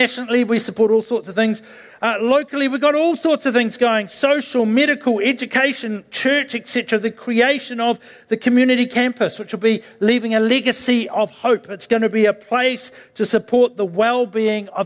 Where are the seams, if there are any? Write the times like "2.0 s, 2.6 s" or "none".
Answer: 1.9 s